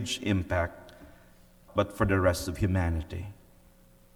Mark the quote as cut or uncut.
cut